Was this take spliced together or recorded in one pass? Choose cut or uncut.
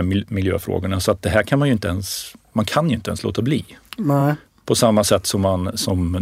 uncut